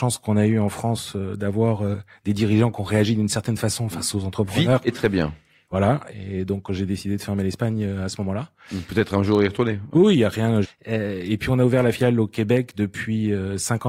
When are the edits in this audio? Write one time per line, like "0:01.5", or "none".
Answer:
0:06.1
0:10.6